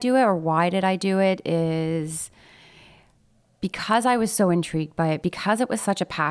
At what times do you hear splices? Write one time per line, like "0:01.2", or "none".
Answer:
0:05.2

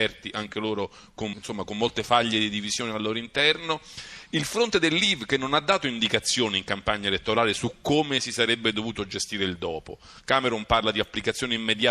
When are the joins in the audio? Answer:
0:01.3

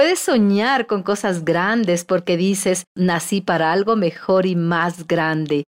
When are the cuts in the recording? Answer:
0:02.9

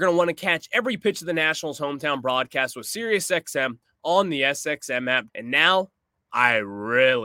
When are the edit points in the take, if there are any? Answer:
0:05.3

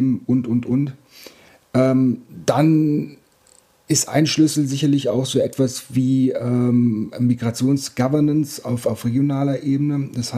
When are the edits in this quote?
none

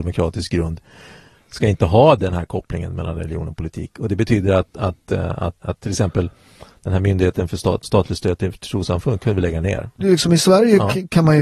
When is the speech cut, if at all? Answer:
0:05.6
0:07.8
0:10.0

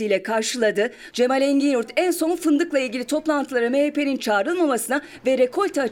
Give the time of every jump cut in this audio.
0:01.1

